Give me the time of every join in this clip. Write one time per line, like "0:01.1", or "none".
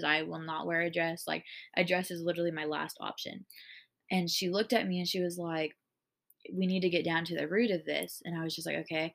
0:04.0